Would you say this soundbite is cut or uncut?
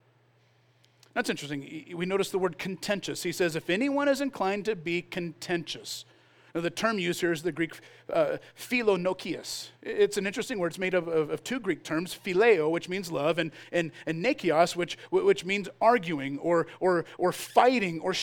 uncut